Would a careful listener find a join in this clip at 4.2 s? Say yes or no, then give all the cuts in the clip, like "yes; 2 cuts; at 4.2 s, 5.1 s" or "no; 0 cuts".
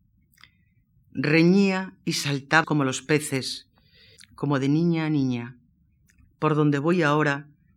yes; 3 cuts; at 2.6 s, 4.2 s, 6.2 s